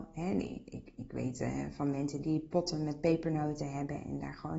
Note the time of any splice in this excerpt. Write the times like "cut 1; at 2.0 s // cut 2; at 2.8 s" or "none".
cut 1; at 2.2 s